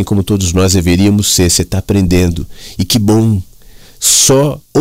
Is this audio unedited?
yes; 0 cuts

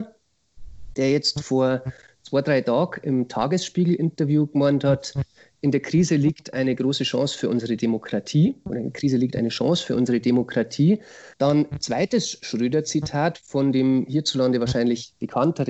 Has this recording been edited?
yes; 1 cut; at 11.3 s

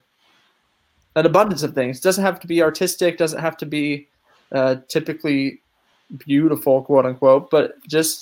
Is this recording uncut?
yes; 0 cuts

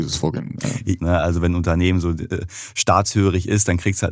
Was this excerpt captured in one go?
no; 1 cut; at 1.0 s

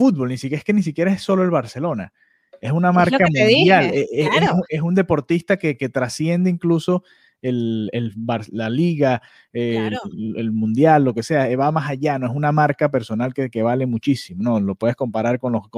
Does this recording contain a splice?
no; 0 cuts

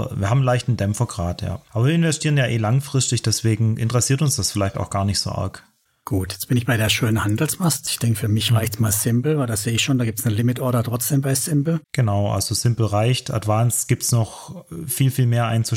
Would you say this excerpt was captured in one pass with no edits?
no; 2 cuts; at 7.9 s, 11.8 s

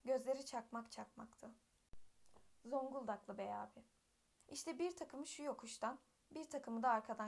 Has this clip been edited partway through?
yes; 1 cut; at 4.4 s

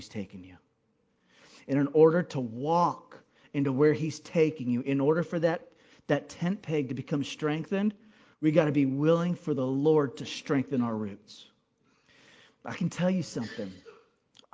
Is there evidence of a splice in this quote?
no; 0 cuts

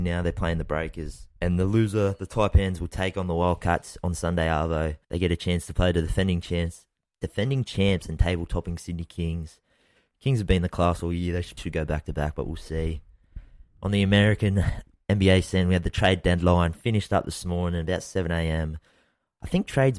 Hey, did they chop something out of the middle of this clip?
yes; 3 cuts; at 1.3 s, 5.0 s, 11.6 s

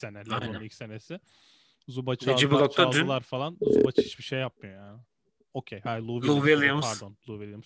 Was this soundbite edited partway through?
yes; 1 cut; at 5.5 s

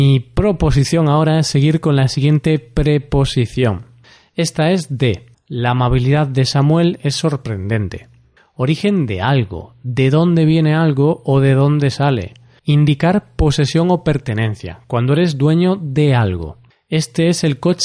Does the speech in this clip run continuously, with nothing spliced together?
no; 2 cuts; at 5.3 s, 12.6 s

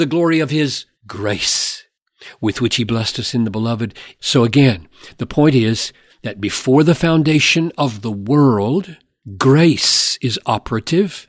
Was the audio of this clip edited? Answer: yes; 2 cuts; at 0.9 s, 4.2 s

